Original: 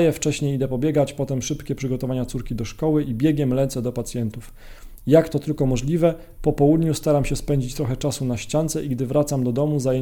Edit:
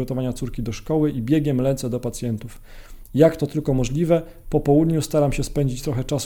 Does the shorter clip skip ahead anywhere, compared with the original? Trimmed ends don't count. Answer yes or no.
no